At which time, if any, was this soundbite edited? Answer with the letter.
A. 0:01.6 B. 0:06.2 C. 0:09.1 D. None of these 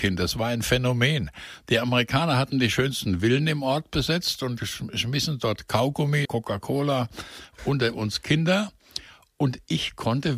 B